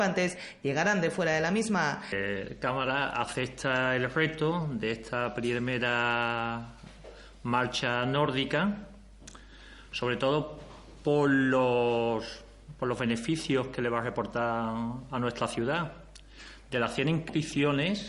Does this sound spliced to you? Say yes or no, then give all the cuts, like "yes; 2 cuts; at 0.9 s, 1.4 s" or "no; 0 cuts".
no; 0 cuts